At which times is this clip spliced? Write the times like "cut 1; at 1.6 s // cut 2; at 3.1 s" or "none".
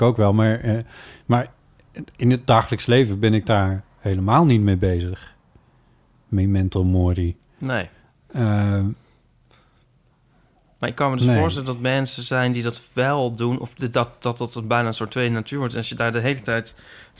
none